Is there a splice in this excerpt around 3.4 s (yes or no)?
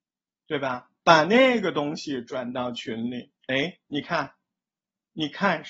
yes